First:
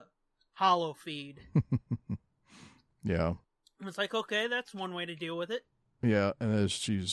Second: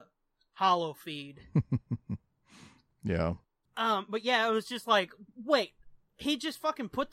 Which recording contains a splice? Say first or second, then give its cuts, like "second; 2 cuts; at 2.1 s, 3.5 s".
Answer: second; 1 cut; at 3.7 s